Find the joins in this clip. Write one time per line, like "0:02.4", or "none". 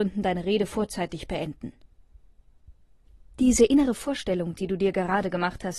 none